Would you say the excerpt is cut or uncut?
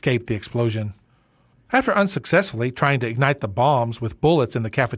cut